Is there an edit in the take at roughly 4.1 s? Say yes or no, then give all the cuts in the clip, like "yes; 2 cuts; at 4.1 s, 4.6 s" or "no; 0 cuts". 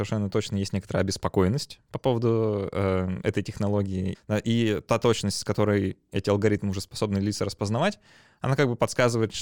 yes; 1 cut; at 4.1 s